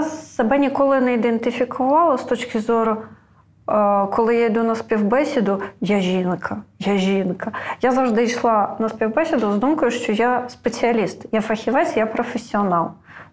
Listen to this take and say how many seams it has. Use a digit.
0